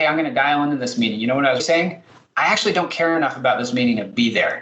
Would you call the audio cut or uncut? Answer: cut